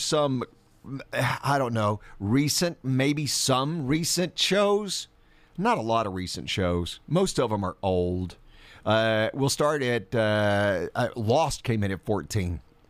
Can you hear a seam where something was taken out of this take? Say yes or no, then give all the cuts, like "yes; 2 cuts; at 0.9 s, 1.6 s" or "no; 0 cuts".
no; 0 cuts